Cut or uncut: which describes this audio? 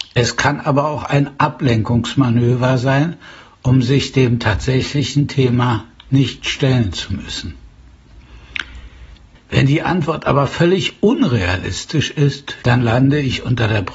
cut